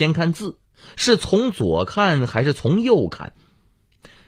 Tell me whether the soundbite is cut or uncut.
uncut